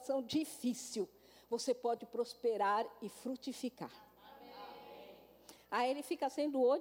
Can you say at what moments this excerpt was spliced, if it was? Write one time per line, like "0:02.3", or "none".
0:05.6